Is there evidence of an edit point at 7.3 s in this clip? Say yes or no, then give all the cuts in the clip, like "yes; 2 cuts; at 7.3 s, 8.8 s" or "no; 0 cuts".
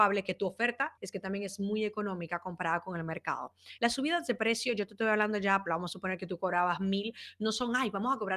no; 3 cuts; at 1.0 s, 3.8 s, 5.7 s